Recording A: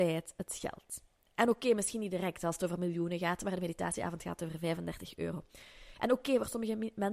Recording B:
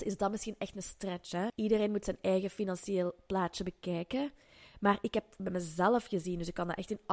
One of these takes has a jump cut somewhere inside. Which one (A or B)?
B